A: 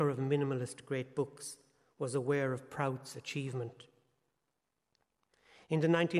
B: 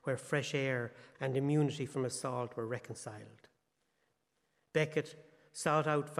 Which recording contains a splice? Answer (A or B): B